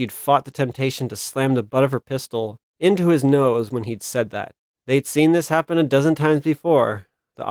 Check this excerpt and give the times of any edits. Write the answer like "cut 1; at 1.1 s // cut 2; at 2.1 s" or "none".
cut 1; at 4.7 s